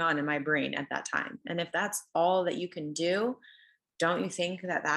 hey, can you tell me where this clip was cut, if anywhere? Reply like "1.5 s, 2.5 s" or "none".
1.4 s